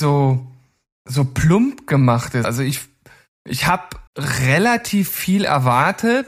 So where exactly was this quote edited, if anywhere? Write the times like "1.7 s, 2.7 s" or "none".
2.4 s, 4.1 s